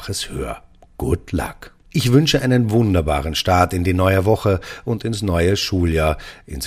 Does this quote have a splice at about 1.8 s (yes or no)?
yes